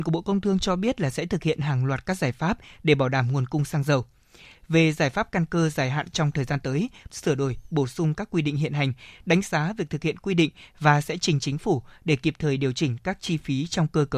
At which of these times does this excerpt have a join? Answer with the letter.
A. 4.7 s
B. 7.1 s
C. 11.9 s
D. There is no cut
B